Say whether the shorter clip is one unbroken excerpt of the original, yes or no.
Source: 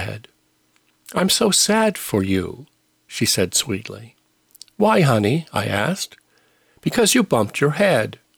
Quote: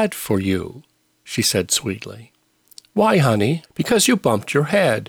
no